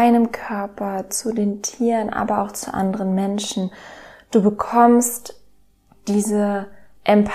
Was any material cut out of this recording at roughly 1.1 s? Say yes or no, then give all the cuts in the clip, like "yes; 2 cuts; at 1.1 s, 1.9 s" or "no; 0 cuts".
yes; 1 cut; at 1.1 s